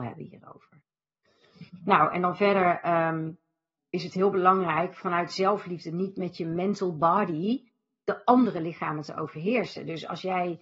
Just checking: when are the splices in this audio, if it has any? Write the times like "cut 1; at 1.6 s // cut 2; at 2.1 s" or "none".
cut 1; at 3.8 s